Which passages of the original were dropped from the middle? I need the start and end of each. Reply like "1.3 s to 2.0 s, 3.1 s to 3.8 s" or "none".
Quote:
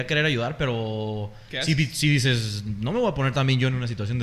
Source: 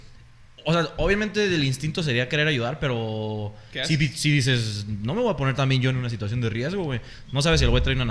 none